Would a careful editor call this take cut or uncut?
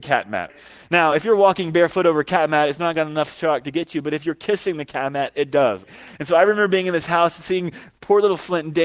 uncut